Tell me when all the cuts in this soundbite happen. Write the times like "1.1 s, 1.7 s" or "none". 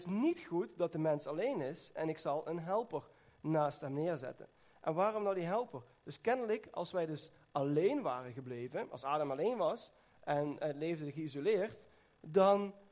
none